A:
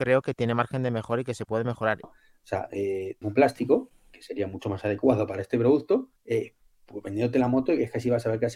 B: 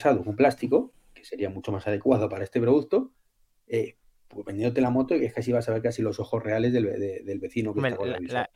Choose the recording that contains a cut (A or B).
A